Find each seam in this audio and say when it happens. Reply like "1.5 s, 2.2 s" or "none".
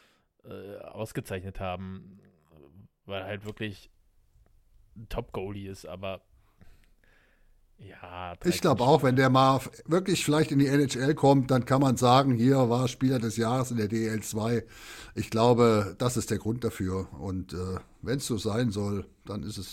none